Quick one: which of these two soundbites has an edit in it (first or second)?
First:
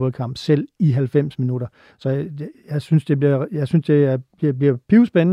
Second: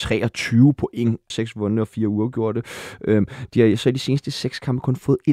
second